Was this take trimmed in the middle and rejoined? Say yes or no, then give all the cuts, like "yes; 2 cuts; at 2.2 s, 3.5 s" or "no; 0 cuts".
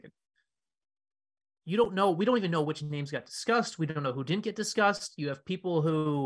no; 0 cuts